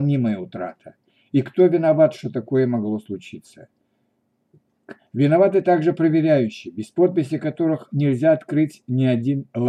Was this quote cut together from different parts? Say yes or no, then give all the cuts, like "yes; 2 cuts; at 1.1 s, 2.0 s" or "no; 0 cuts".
yes; 1 cut; at 5.0 s